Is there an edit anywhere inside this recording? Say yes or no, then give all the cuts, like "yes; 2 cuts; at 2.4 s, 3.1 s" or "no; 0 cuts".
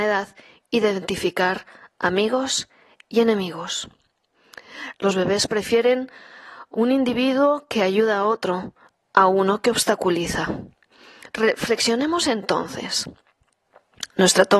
yes; 2 cuts; at 4.9 s, 11.3 s